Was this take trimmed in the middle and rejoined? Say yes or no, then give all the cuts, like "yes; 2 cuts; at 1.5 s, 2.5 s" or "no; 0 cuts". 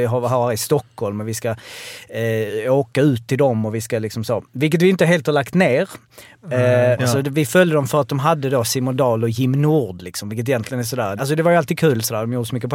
yes; 2 cuts; at 6.9 s, 11.2 s